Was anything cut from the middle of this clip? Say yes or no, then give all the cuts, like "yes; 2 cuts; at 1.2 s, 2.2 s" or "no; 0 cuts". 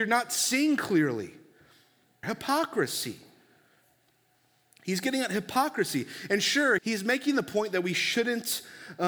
yes; 2 cuts; at 2.2 s, 6.8 s